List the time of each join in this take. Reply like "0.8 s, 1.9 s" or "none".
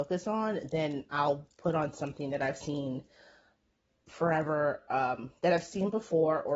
none

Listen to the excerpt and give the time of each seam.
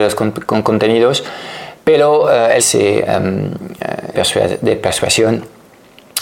2.6 s, 4.1 s

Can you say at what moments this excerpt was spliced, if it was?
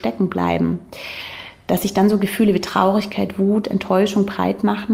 none

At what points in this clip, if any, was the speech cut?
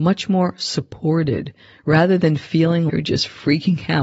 2.9 s

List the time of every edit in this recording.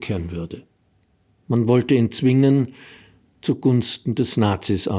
1.4 s

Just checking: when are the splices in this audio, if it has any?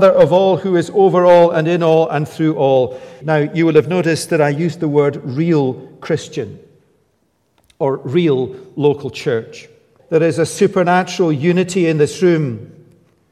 3.2 s, 10.0 s

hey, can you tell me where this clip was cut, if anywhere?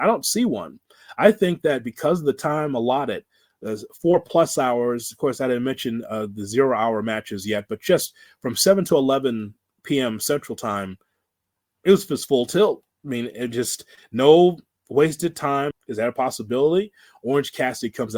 12.9 s, 15.7 s

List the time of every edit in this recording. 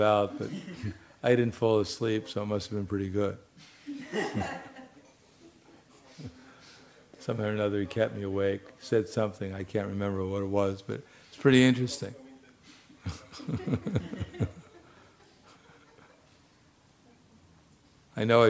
none

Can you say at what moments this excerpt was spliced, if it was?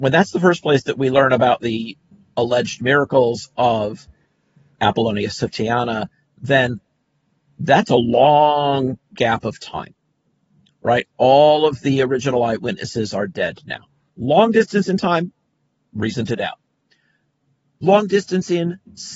14.1 s

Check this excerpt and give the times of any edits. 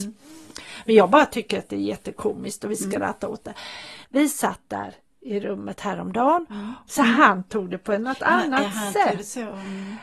4.0 s, 6.9 s

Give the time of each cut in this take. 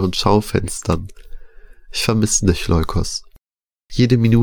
none

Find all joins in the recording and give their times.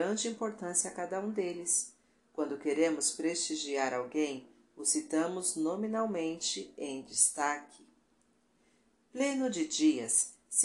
none

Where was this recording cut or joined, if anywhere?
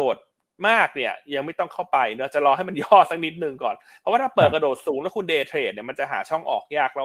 none

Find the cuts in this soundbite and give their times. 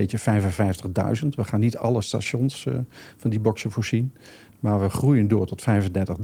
none

